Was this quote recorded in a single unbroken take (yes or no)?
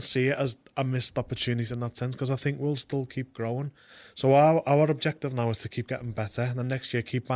yes